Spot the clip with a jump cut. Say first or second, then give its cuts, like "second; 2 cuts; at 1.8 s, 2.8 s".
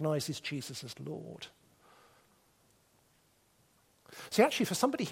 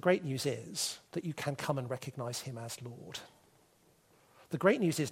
second; 1 cut; at 1.1 s